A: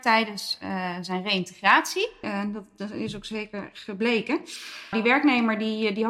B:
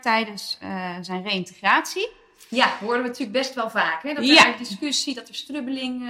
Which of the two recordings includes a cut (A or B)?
A